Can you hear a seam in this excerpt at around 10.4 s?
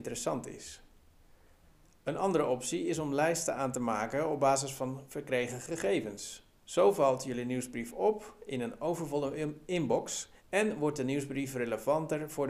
yes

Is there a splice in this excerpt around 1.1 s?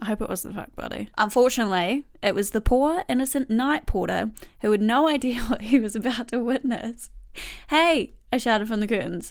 yes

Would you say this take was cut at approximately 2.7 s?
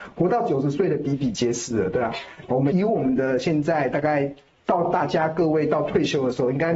yes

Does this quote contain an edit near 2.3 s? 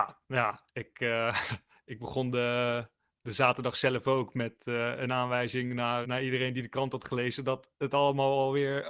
no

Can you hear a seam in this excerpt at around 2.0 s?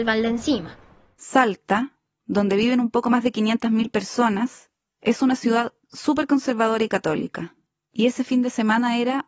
no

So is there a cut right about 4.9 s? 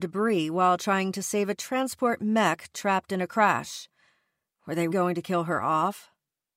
yes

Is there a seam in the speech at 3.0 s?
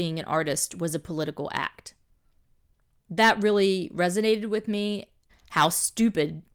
no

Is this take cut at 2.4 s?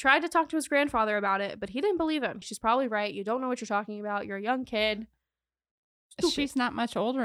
yes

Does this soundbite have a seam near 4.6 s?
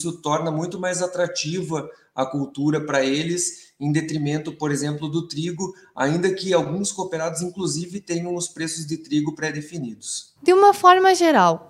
no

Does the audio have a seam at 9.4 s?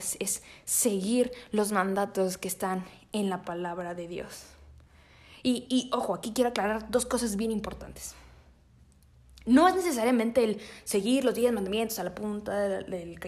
no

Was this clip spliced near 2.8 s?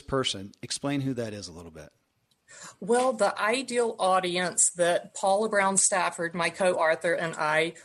no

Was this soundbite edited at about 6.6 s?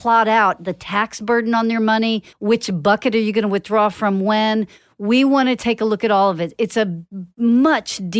no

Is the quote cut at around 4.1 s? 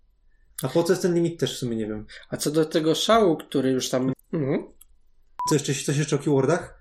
yes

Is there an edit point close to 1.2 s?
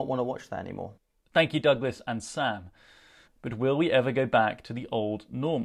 no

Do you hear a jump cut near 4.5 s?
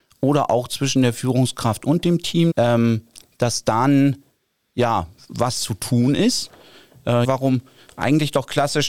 no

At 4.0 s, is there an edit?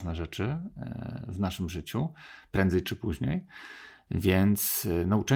no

